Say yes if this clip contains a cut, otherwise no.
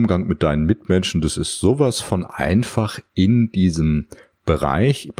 no